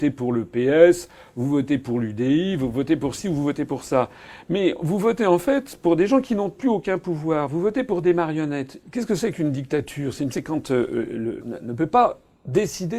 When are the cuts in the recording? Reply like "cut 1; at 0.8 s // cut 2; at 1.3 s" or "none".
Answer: cut 1; at 8.8 s // cut 2; at 10.3 s // cut 3; at 11.4 s